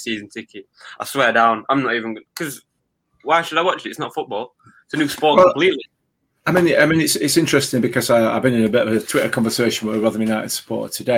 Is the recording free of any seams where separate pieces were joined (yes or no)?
yes